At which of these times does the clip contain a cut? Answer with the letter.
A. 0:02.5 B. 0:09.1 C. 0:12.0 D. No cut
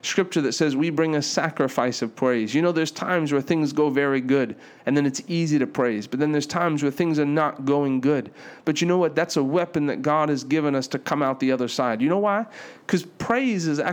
D